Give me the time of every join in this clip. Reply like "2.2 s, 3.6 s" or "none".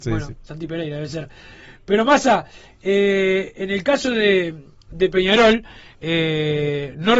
none